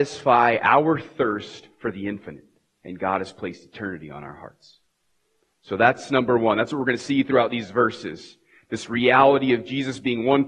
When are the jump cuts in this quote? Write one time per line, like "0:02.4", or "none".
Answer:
none